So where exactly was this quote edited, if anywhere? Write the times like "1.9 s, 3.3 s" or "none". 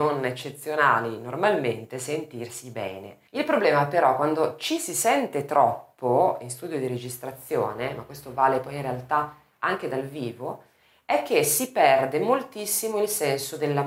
3.3 s